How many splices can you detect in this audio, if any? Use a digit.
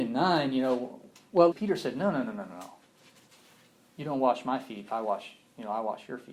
1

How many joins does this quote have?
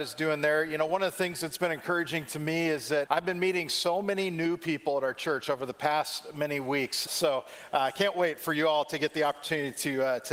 2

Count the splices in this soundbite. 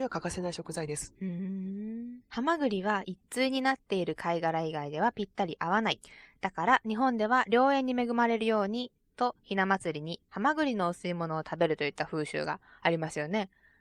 1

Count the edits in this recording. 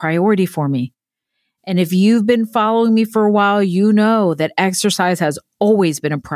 0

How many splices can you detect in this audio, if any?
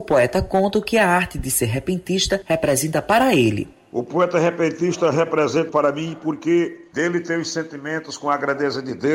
1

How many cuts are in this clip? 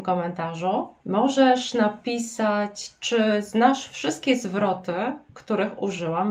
1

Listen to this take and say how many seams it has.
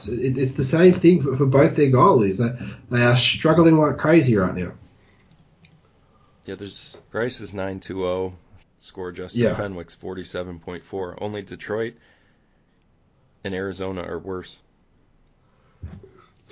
2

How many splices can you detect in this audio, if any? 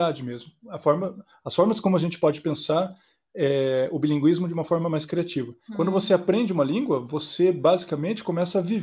1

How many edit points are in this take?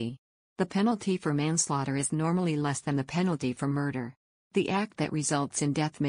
1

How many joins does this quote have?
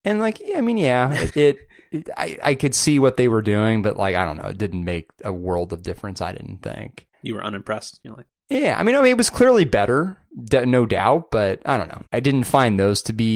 3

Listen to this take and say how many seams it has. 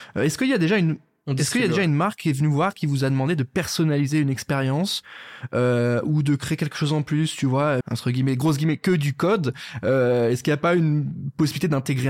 1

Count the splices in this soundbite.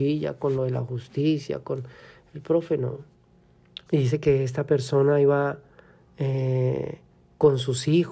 1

